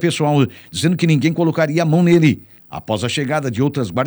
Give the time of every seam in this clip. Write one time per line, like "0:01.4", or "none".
0:02.6